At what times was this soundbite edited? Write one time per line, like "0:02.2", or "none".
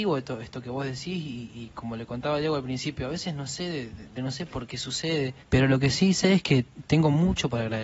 0:04.2
0:05.4